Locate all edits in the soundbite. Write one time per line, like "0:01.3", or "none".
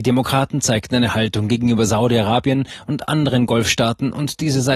none